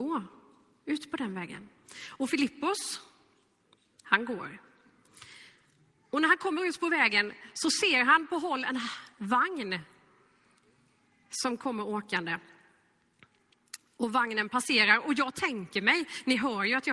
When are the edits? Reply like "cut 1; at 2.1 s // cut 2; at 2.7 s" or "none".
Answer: none